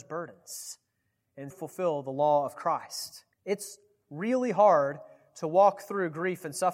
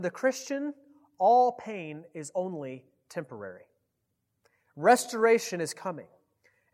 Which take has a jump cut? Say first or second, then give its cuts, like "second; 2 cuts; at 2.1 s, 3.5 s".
first; 2 cuts; at 1.5 s, 3.3 s